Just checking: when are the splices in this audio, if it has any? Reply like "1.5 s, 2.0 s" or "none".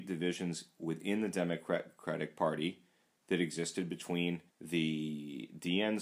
4.5 s